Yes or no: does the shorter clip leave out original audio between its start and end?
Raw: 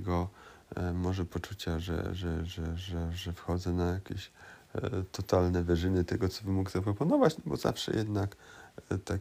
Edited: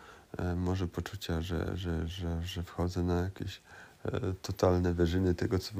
yes